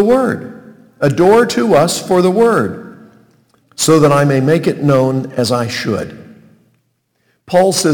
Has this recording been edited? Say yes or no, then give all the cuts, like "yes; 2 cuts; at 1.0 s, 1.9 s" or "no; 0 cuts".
yes; 1 cut; at 3.6 s